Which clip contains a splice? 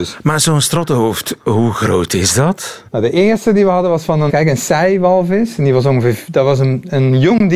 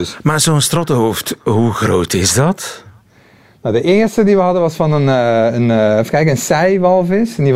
first; 2 cuts; at 2.9 s, 4.3 s

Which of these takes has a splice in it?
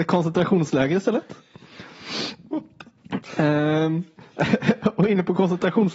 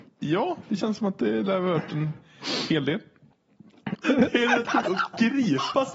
second; 1 cut; at 4.0 s

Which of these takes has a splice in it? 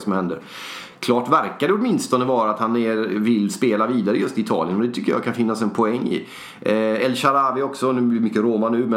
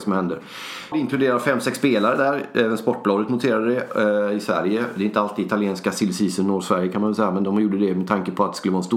second; 1 cut; at 0.9 s

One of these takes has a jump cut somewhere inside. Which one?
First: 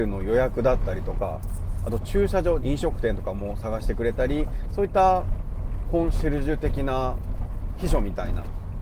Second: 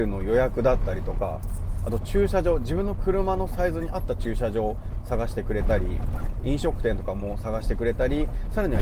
first; 2 cuts; at 2.6 s, 4.7 s

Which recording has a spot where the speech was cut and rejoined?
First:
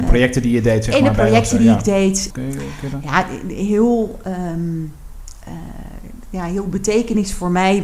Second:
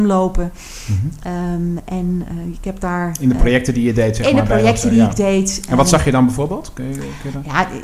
first; 1 cut; at 2.3 s

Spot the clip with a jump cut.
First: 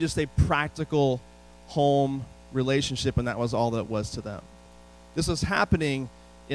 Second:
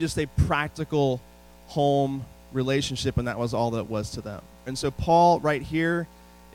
second; 1 cut; at 4.7 s

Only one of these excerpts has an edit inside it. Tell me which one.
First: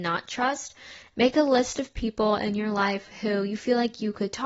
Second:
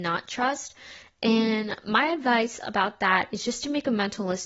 first; 1 cut; at 1.1 s

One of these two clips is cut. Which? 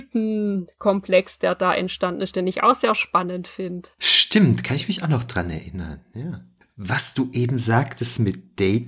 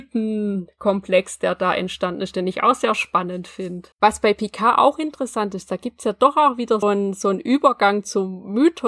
second; 2 cuts; at 3.9 s, 6.8 s

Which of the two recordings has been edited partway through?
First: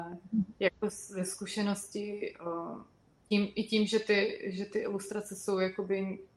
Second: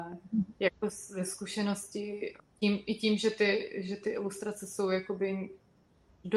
second; 1 cut; at 2.4 s

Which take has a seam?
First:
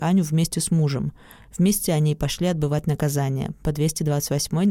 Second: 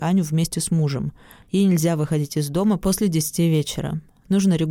second; 1 cut; at 1.4 s

